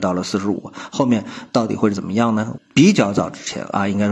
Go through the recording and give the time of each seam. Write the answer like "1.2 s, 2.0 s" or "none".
2.6 s